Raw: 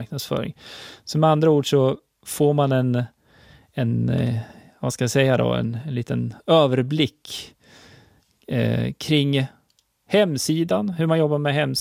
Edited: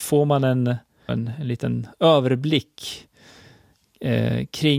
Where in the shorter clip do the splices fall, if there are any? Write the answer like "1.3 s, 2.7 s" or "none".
1.1 s